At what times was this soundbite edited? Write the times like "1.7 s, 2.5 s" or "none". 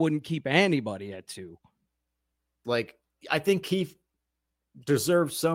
2.6 s